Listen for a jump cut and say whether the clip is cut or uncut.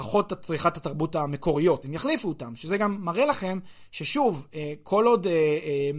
uncut